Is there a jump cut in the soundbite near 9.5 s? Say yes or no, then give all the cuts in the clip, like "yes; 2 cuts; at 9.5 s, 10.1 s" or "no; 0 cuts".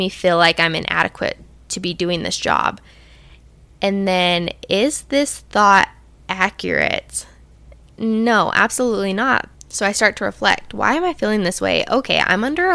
yes; 1 cut; at 9.5 s